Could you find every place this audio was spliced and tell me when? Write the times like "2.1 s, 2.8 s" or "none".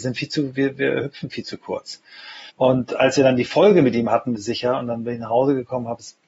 2.5 s, 4.3 s